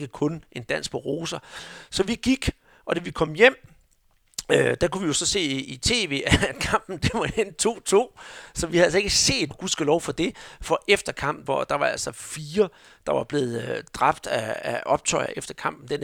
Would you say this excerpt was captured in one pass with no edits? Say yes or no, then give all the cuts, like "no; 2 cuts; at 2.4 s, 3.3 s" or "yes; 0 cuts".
no; 2 cuts; at 9.5 s, 11.5 s